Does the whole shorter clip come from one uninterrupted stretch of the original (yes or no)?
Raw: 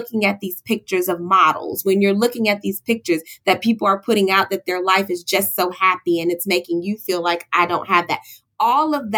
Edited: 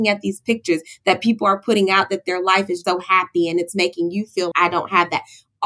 no